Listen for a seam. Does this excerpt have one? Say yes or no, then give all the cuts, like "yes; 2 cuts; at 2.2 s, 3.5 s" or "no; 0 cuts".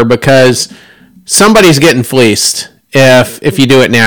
no; 0 cuts